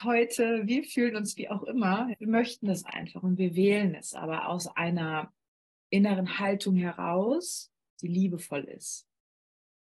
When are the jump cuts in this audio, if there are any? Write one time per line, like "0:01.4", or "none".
0:02.1